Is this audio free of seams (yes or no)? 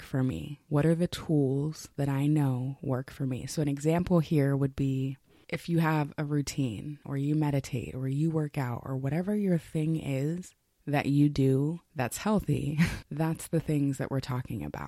no